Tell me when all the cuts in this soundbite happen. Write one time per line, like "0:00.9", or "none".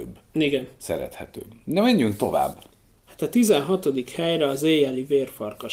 none